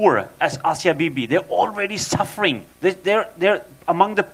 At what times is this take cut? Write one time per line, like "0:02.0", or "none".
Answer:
0:02.7